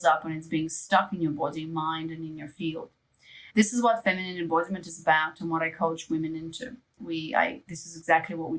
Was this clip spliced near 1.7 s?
no; 2 cuts; at 3.5 s, 7.0 s

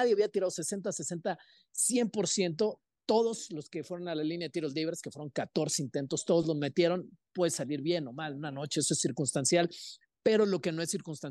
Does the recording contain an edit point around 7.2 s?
no; 0 cuts

